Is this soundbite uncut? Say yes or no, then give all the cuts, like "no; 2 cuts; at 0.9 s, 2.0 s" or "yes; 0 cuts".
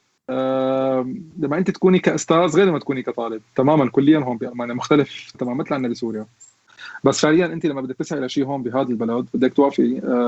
no; 1 cut; at 5.3 s